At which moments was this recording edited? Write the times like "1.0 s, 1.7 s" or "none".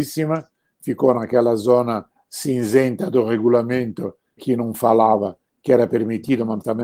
4.4 s